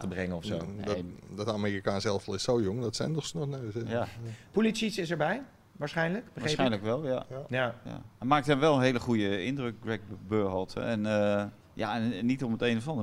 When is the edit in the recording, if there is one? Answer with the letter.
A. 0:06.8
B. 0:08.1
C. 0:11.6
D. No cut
C